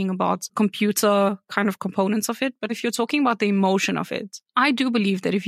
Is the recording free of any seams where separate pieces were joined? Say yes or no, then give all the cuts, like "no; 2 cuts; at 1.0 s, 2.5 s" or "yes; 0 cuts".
no; 1 cut; at 2.7 s